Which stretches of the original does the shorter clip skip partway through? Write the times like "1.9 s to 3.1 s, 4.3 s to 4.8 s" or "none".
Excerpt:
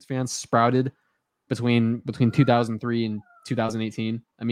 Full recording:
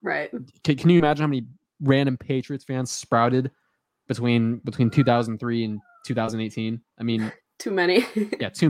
none